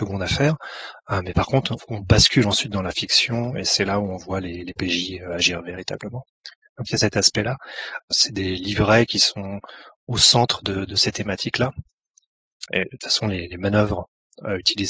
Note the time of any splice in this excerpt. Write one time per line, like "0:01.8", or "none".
0:08.0
0:12.7